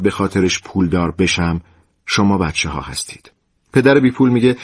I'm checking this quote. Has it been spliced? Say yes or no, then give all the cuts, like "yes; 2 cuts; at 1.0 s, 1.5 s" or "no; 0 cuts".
yes; 1 cut; at 3.6 s